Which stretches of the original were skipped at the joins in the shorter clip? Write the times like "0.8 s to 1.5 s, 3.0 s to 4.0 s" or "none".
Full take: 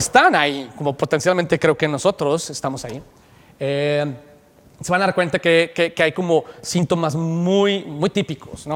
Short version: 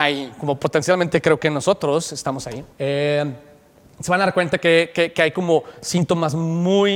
3.1 s to 3.5 s

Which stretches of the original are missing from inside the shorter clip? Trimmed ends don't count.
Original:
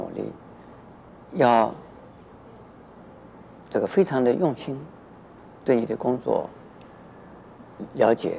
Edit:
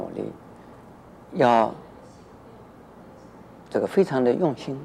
none

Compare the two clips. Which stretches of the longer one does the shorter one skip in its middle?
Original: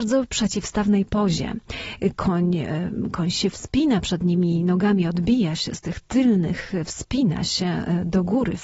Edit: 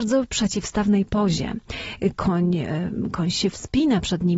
none

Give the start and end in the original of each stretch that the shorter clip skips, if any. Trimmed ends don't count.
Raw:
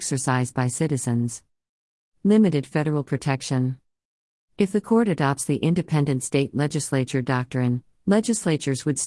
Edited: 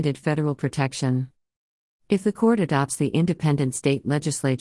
none

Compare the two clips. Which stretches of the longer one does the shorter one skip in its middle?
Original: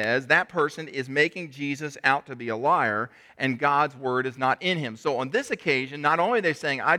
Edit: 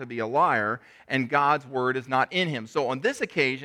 none

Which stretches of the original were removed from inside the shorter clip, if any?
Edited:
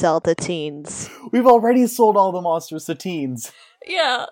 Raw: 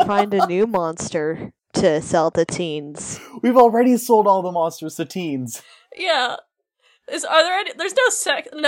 none

